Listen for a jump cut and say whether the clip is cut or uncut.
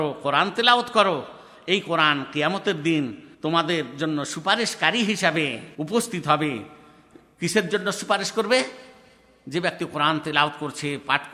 cut